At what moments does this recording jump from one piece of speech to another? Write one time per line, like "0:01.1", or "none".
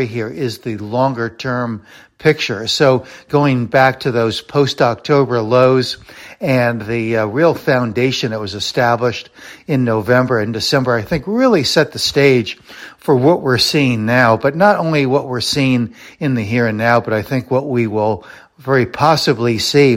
none